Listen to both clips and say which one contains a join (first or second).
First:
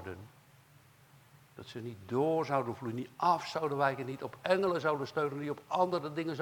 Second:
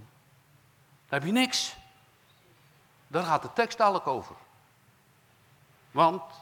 second